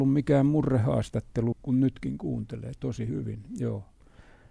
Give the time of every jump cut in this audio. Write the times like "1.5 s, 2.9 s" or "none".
1.5 s